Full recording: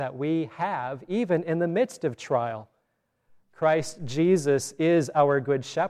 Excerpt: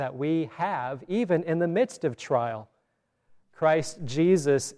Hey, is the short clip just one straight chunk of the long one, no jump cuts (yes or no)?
yes